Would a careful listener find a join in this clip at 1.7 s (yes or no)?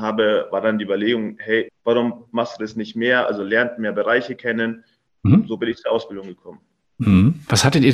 yes